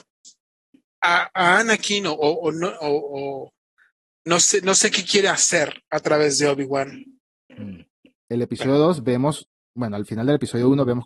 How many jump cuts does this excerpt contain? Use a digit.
1